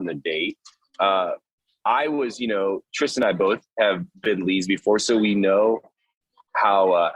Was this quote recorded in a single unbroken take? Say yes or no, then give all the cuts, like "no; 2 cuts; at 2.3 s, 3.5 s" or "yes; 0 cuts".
yes; 0 cuts